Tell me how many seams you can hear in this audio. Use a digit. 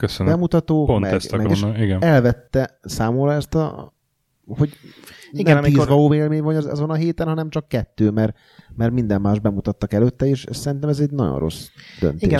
1